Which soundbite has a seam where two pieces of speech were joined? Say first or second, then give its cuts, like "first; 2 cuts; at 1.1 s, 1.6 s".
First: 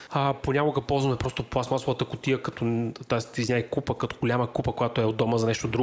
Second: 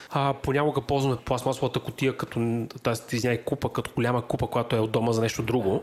second; 1 cut; at 1.2 s